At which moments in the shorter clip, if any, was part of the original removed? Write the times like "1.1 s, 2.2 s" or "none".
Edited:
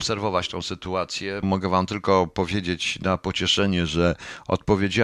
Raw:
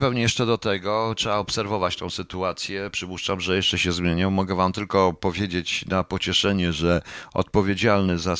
1.4 s

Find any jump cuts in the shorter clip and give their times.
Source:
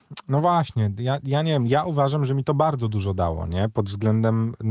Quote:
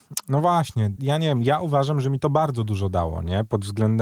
1.0 s

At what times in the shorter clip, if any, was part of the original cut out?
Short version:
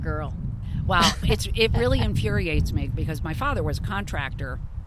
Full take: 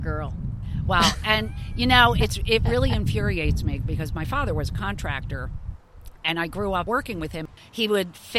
1.2 s

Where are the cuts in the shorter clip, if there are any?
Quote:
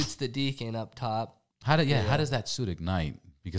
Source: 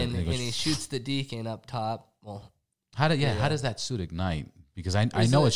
1.5 s

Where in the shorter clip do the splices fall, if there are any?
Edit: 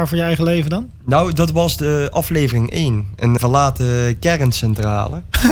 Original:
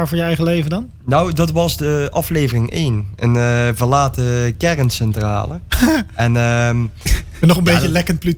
3.4 s

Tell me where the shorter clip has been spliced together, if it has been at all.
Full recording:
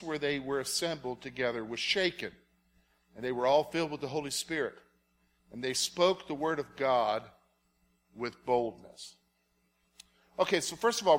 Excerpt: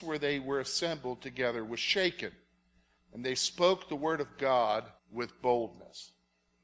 3.0 s, 5.0 s

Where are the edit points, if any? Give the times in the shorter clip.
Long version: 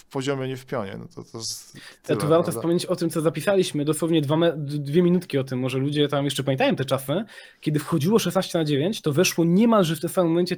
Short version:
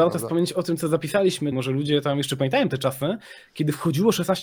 1.5 s

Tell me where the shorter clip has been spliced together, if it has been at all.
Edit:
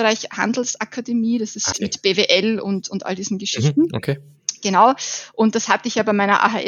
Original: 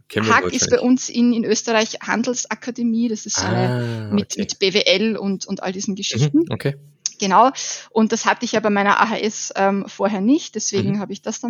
1.7 s

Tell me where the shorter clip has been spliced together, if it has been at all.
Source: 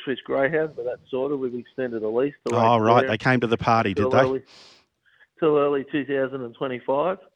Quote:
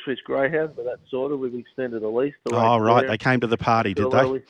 none

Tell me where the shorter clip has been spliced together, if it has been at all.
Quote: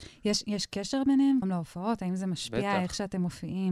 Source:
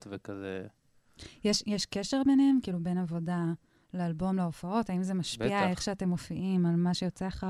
1.4 s

